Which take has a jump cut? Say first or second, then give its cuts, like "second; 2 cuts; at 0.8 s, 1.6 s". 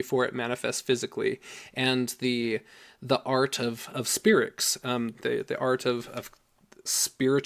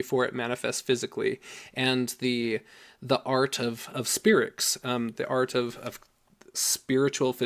second; 1 cut; at 5.1 s